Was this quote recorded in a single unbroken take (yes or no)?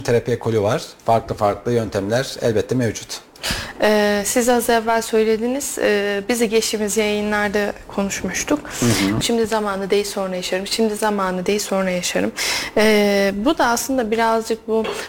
no